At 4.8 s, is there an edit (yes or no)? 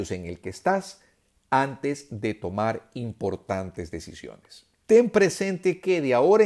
yes